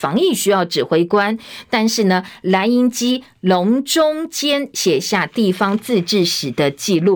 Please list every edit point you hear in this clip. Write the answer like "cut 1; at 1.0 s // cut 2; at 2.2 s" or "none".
none